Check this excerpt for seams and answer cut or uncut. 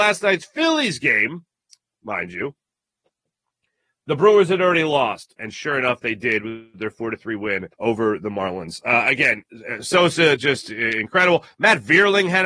cut